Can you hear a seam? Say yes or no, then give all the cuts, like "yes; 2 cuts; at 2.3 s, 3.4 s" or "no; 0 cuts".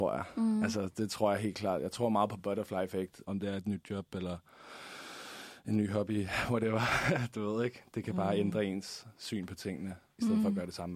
yes; 1 cut; at 3.2 s